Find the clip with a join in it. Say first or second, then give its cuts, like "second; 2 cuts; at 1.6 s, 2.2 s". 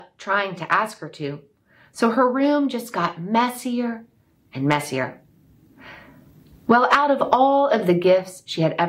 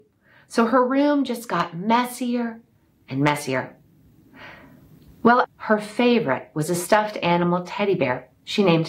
second; 1 cut; at 5.4 s